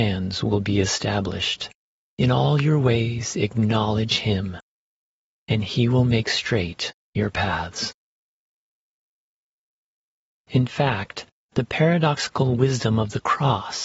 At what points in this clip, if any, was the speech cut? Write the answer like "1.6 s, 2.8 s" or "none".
2.0 s